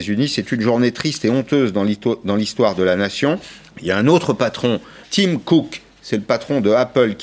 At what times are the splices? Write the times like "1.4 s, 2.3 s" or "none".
3.7 s, 5.0 s